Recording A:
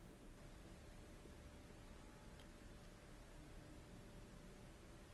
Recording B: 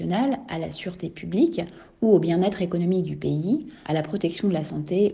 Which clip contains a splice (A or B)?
B